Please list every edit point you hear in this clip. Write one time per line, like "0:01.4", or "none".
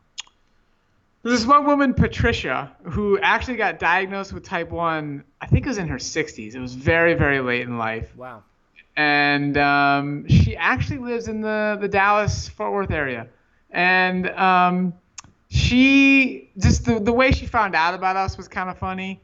none